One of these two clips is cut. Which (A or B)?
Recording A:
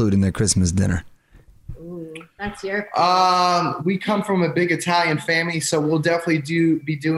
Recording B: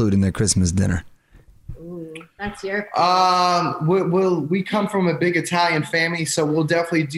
A